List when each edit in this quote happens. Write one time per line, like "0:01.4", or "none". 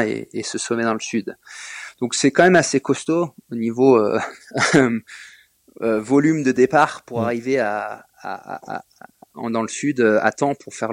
0:09.4